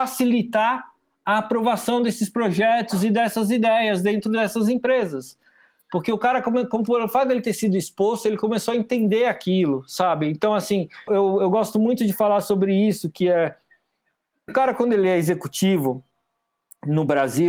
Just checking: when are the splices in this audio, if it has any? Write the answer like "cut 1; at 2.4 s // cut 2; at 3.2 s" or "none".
cut 1; at 11.1 s // cut 2; at 14.5 s